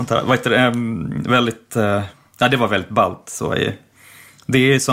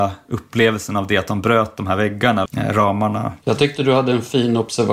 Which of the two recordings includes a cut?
second; 1 cut; at 2.5 s

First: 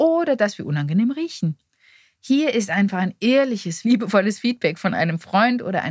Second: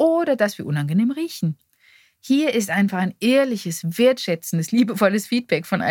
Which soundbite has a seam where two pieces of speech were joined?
first; 1 cut; at 3.8 s

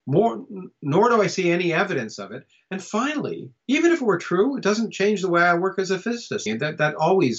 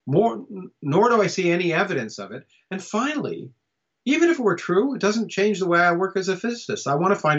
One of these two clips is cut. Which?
first; 2 cuts; at 3.6 s, 6.5 s

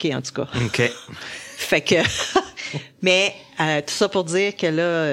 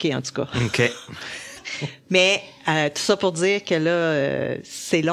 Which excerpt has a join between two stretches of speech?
second; 1 cut; at 1.6 s

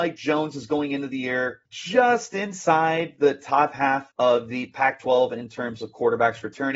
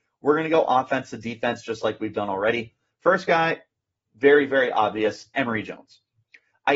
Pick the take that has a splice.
first; 2 cuts; at 1.7 s, 4.1 s

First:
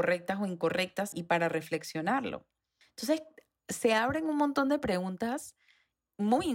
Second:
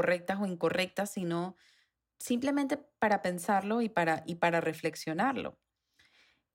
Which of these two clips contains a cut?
first; 2 cuts; at 1.1 s, 2.8 s

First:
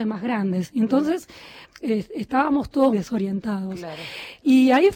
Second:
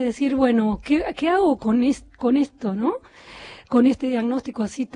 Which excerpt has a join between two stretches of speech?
first; 2 cuts; at 1.6 s, 2.9 s

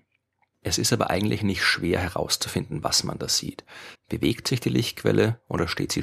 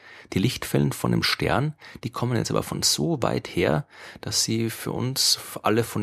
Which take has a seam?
first; 1 cut; at 3.9 s

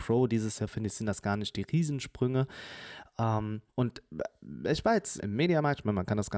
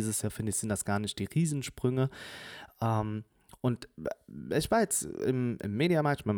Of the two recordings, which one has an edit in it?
first; 2 cuts; at 3.7 s, 5.2 s

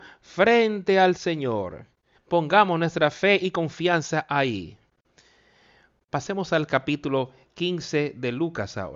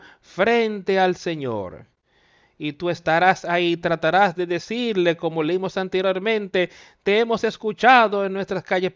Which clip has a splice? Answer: first; 1 cut; at 2.1 s

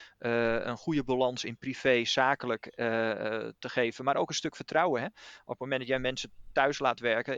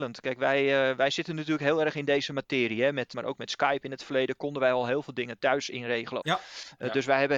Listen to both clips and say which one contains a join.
second; 2 cuts; at 3.1 s, 6.2 s

